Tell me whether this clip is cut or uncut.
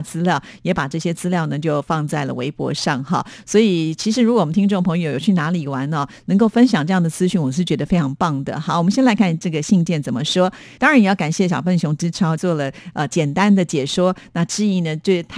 cut